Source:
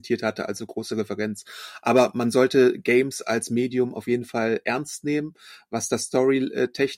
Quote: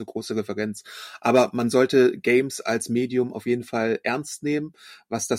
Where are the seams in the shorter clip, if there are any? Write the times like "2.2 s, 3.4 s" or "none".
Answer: none

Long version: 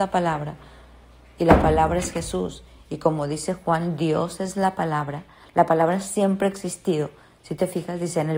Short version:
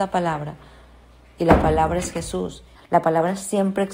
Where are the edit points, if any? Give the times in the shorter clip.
2.7 s

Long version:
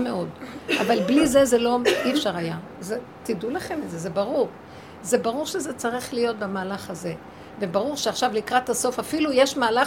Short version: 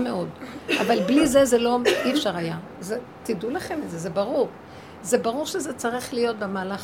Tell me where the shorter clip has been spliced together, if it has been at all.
none

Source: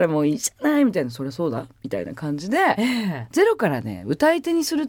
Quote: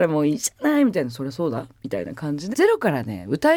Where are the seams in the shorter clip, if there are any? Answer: 2.5 s

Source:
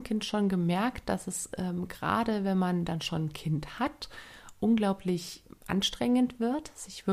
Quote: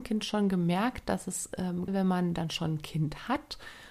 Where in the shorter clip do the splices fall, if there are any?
1.9 s

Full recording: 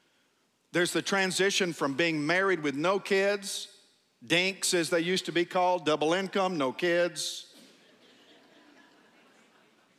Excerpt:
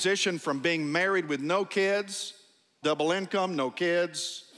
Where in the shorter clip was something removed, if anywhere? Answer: 2.8 s

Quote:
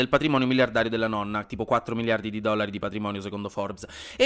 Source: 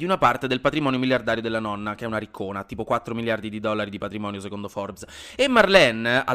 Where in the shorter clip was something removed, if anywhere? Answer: 1.4 s

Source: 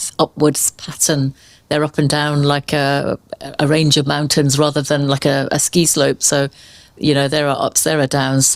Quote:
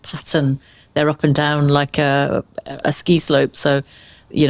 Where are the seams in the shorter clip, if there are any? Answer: 2.8 s

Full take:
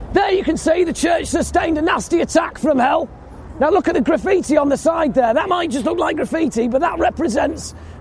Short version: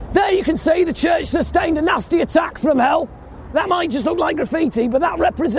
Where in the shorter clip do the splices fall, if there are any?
3.5 s

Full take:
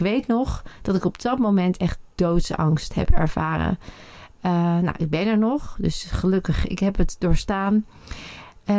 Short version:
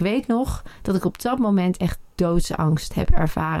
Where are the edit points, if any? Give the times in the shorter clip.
none

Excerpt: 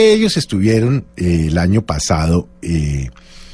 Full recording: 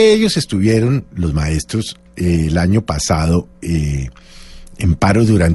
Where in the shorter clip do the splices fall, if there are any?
1.1 s

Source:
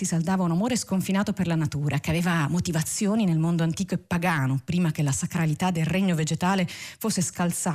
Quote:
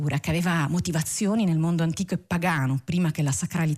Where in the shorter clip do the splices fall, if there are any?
none

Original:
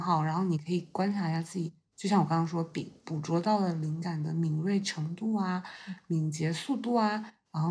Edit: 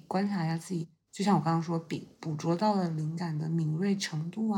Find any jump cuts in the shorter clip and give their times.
none

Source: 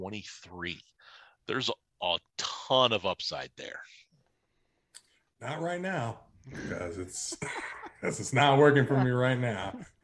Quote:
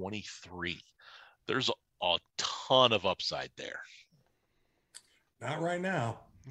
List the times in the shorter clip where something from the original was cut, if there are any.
none

